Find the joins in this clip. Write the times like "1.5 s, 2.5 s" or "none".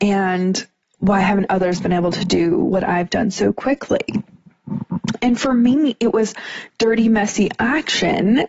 none